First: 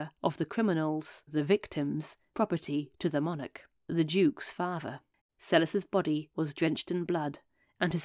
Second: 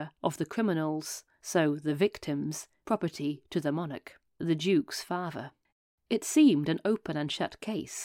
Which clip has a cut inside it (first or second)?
first